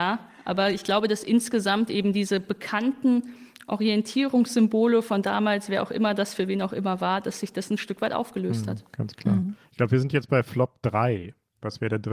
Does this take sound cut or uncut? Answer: uncut